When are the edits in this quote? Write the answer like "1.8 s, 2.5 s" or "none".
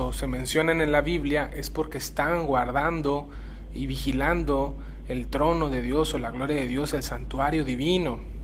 none